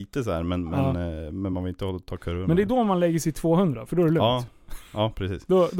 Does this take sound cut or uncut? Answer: uncut